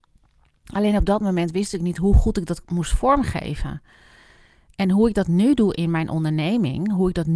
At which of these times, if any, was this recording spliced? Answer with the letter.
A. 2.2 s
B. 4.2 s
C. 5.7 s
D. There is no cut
D